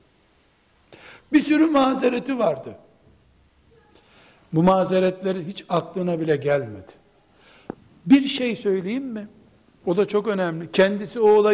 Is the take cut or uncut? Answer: cut